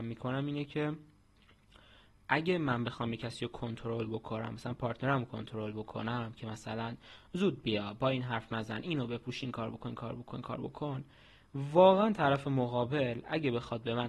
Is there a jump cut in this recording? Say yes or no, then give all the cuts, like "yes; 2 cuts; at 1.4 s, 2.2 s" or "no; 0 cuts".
no; 0 cuts